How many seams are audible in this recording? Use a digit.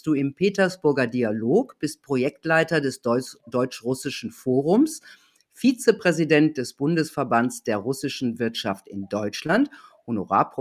0